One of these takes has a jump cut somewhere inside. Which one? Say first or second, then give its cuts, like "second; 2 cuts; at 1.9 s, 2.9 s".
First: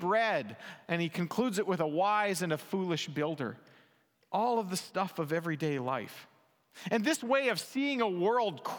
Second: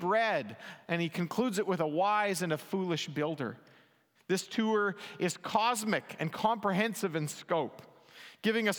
second; 1 cut; at 4.1 s